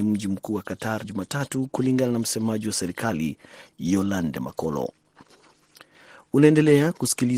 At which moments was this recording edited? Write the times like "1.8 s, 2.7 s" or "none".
1.0 s